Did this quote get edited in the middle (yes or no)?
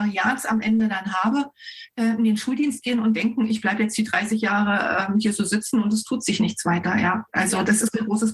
no